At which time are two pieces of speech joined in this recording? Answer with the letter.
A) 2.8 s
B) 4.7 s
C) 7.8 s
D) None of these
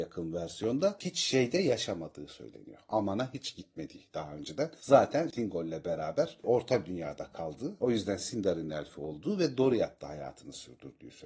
D